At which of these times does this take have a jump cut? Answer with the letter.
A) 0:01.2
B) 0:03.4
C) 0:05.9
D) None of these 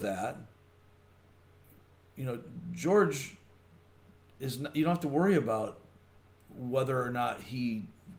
D